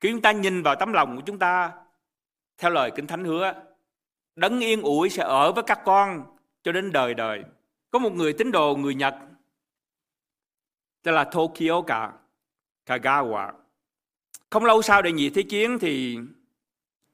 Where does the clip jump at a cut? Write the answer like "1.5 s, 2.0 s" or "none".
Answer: 7.8 s, 14.4 s